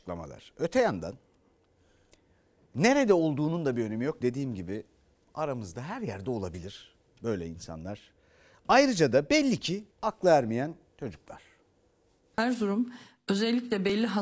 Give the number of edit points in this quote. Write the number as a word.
two